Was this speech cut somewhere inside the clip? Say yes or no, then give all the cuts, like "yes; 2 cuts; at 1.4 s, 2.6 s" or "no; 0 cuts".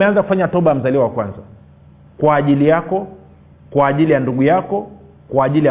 no; 0 cuts